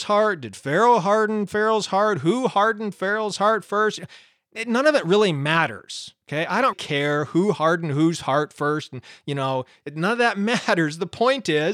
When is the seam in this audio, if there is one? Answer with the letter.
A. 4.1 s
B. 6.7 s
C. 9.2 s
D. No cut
B